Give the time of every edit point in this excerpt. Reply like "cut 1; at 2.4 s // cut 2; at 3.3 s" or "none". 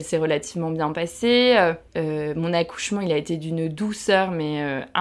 cut 1; at 1.9 s